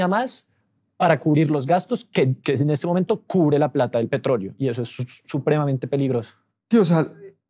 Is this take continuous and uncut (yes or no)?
yes